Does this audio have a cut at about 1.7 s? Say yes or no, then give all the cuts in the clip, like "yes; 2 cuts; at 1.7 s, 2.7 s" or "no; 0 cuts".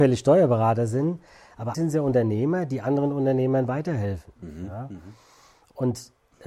yes; 1 cut; at 1.7 s